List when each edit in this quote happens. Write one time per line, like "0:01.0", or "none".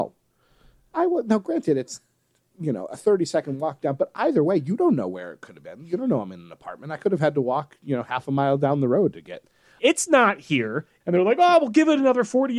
0:09.8
0:11.0